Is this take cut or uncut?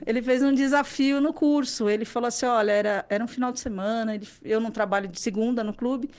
uncut